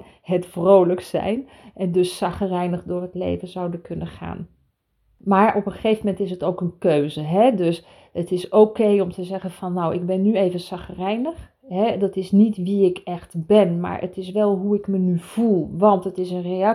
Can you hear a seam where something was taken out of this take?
no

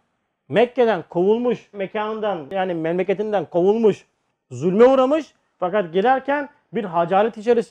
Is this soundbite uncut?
yes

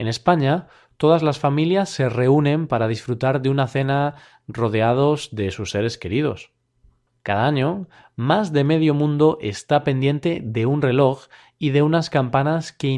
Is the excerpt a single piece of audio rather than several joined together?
no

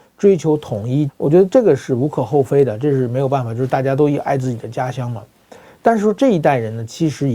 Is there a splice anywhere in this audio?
yes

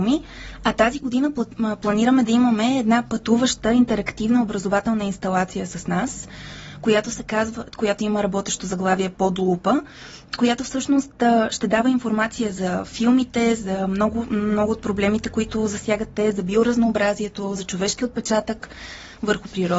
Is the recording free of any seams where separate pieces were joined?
no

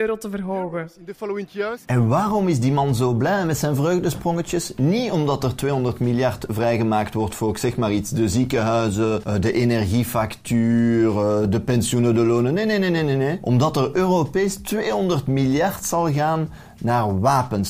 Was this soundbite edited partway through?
no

